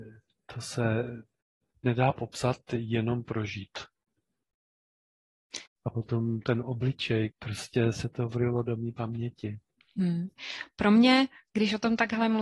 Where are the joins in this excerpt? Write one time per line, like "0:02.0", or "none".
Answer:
0:05.7
0:07.3